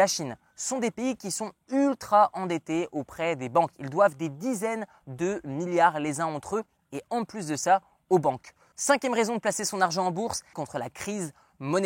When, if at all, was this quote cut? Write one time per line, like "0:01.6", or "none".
0:08.7
0:10.5